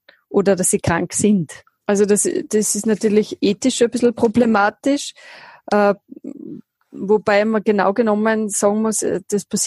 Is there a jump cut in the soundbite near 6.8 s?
no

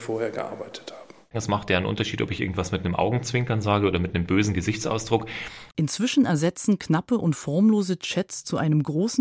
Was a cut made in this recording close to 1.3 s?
yes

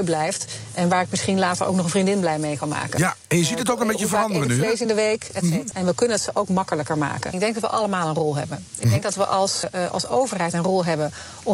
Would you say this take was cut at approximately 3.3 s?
no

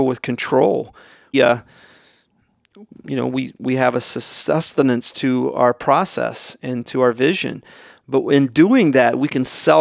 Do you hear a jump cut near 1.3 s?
yes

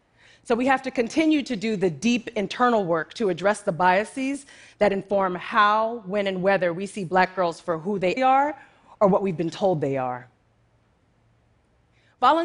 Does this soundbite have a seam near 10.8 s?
no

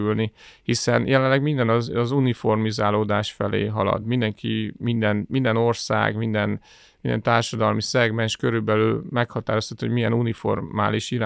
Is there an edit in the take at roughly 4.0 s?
no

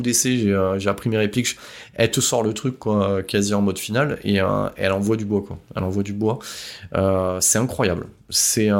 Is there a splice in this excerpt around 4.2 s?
no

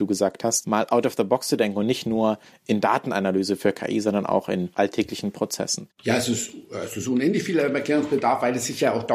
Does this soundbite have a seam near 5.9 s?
yes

